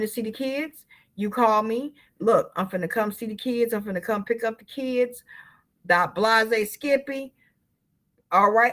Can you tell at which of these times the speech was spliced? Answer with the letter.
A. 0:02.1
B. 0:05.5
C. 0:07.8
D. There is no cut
A